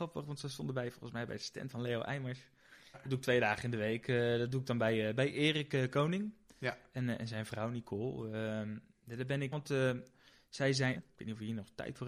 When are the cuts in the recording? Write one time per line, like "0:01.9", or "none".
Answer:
0:02.9
0:09.5
0:10.9